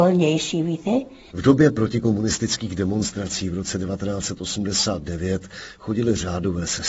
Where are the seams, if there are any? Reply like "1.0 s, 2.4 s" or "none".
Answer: 1.3 s

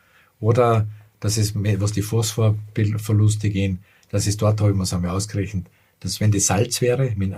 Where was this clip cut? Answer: none

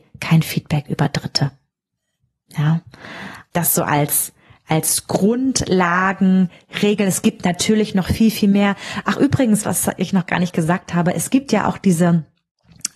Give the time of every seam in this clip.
3.5 s

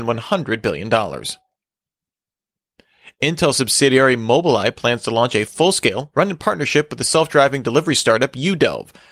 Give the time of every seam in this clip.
6.1 s

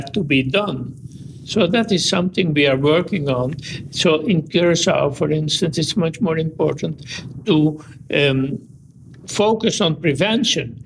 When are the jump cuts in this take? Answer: none

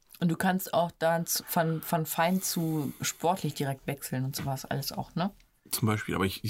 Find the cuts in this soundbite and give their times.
none

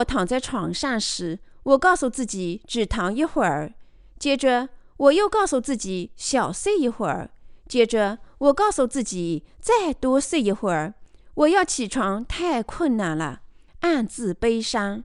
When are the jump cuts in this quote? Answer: 13.7 s

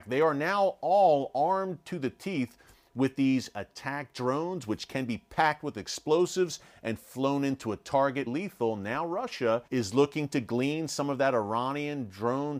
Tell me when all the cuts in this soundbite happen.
8.3 s, 9.7 s

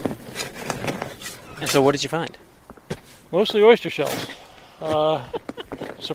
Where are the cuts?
none

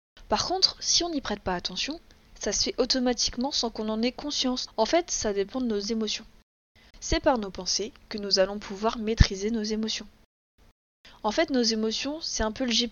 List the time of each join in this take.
4.7 s, 6.9 s

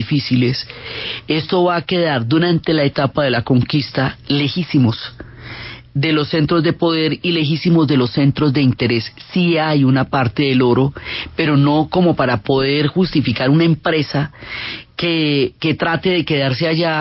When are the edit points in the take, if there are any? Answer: none

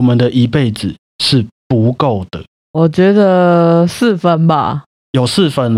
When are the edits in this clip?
2.7 s

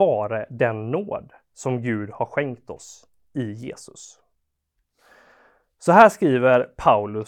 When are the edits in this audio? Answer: none

